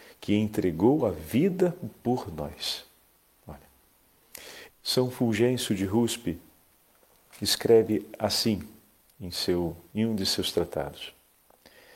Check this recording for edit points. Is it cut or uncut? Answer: cut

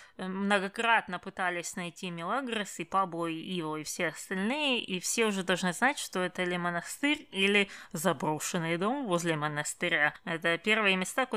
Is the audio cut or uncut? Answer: uncut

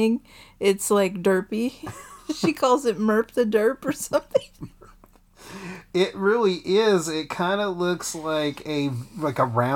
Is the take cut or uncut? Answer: uncut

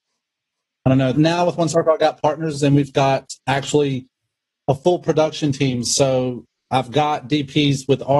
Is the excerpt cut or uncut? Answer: cut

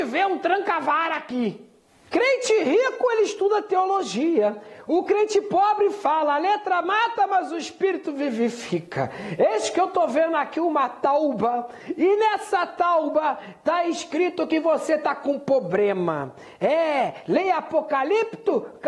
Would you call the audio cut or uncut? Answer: uncut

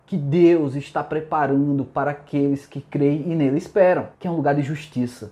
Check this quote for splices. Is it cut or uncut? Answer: cut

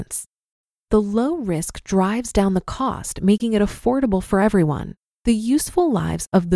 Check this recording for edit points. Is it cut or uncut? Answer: cut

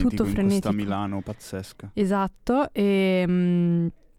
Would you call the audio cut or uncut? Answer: uncut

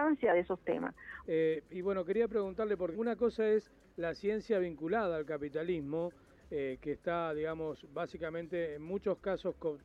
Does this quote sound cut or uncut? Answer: cut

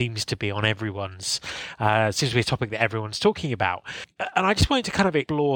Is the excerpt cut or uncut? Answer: uncut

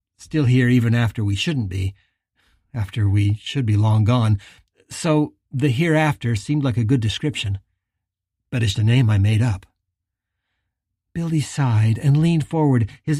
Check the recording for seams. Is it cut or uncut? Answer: cut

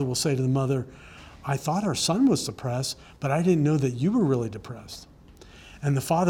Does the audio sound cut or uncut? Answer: uncut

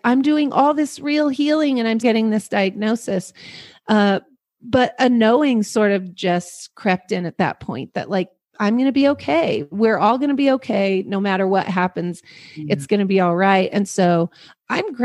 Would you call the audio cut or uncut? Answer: cut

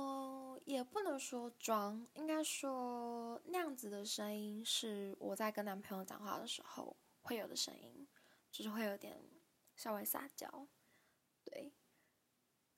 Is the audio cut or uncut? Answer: uncut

